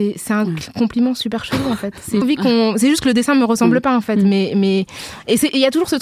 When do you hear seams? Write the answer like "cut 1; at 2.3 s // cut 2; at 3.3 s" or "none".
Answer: cut 1; at 2.2 s